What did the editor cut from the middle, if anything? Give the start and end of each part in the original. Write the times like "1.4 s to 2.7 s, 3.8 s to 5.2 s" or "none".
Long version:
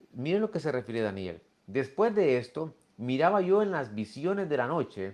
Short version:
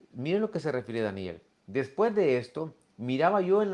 none